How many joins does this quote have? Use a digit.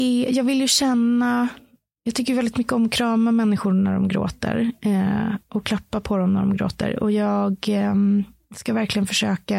0